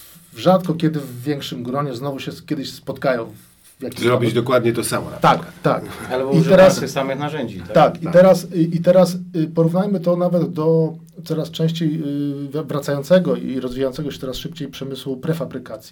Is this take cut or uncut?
uncut